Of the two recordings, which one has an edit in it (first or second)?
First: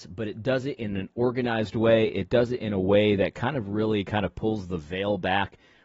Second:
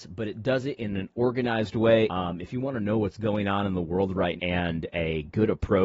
second